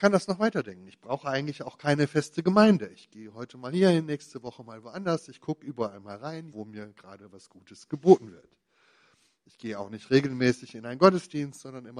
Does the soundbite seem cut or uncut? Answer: cut